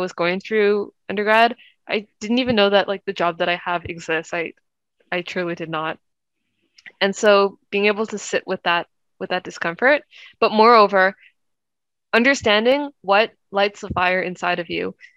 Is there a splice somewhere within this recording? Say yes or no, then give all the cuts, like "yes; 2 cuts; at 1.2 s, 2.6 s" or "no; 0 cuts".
no; 0 cuts